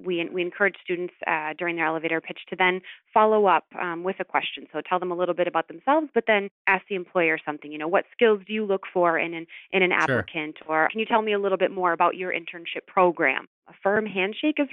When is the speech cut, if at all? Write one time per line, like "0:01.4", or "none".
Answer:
0:10.9
0:13.6